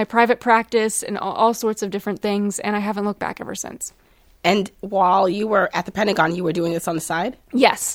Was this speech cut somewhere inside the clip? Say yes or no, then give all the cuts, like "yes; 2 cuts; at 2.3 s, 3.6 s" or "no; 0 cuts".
no; 0 cuts